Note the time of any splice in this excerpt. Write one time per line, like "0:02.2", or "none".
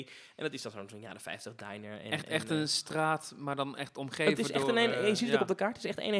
none